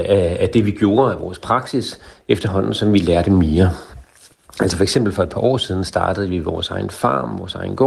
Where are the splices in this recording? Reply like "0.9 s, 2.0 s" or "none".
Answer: none